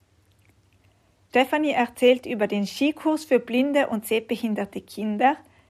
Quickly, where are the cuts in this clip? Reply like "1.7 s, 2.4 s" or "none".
1.3 s